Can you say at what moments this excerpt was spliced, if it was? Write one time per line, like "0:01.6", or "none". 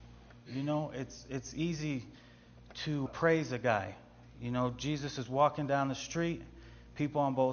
0:03.1